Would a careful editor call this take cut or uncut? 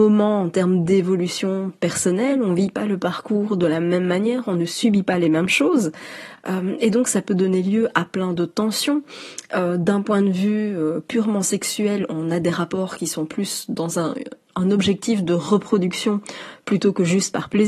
uncut